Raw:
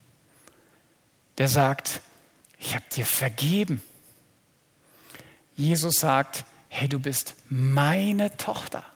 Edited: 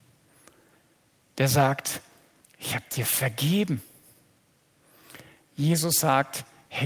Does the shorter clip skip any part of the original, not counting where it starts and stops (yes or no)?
no